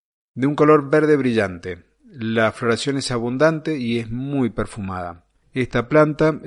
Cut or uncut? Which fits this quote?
cut